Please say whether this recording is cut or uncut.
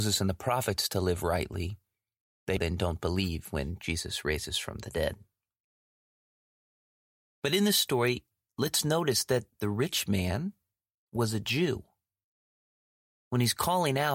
cut